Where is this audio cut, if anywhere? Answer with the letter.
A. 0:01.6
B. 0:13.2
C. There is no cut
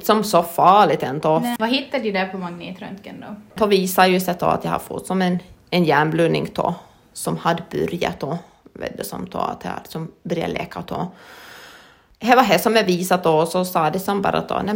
A